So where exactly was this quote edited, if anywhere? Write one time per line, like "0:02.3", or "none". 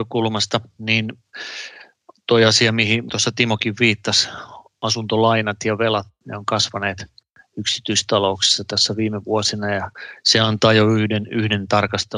none